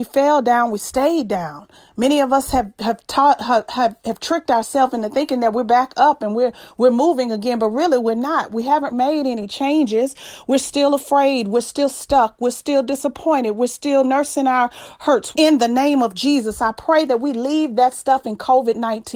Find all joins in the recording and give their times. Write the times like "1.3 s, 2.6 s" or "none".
8.9 s, 15.3 s